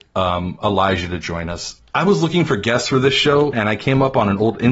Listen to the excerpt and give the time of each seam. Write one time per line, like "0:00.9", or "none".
0:01.8
0:03.5